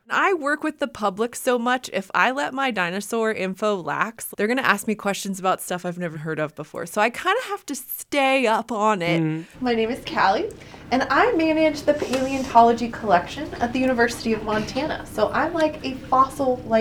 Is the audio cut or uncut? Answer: cut